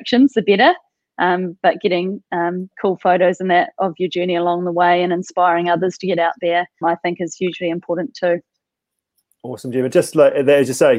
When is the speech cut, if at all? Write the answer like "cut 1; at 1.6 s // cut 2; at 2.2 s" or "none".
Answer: cut 1; at 6.8 s

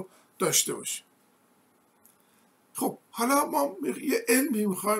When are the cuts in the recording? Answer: none

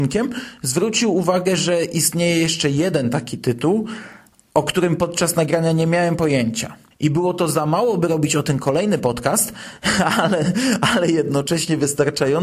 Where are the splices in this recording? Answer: cut 1; at 6.9 s

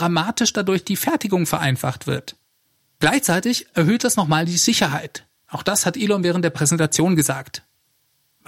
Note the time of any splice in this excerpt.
none

